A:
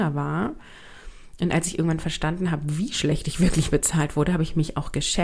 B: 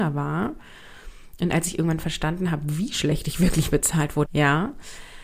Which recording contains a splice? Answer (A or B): B